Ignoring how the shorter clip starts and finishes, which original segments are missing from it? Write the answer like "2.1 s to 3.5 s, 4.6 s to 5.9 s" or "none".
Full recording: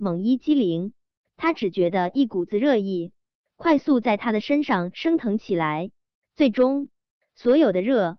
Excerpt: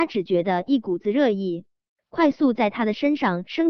none